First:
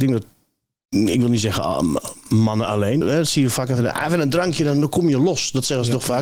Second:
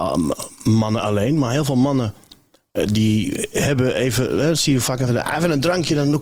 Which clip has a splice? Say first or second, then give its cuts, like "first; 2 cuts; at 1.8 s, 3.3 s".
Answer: first; 1 cut; at 3.0 s